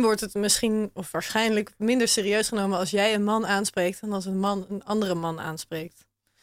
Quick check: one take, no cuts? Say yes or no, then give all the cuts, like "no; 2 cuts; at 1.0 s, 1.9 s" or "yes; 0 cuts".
yes; 0 cuts